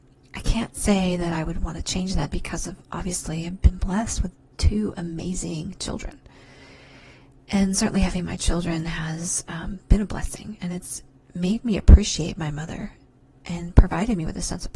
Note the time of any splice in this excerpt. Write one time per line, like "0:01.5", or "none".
none